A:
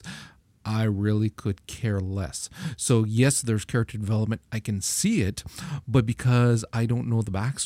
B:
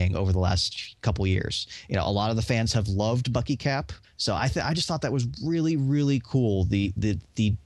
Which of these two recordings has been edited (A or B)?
B